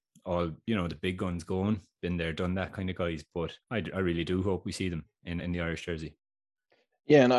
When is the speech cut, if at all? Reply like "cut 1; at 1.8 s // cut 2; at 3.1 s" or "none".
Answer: cut 1; at 3.6 s // cut 2; at 5.4 s